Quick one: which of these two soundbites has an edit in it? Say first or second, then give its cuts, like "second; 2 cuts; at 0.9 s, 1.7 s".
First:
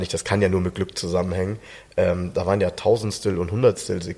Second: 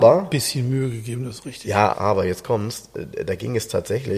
second; 1 cut; at 1.9 s